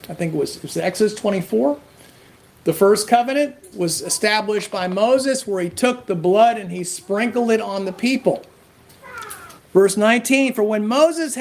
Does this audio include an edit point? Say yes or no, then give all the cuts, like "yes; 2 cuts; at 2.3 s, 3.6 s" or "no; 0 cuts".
yes; 2 cuts; at 3.7 s, 9.6 s